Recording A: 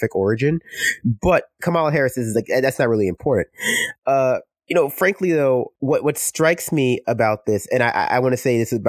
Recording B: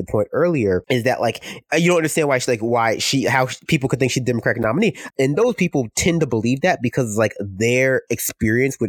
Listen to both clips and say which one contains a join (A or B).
B